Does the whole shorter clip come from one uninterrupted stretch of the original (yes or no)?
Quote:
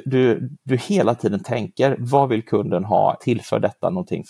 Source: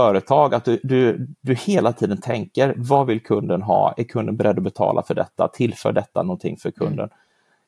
no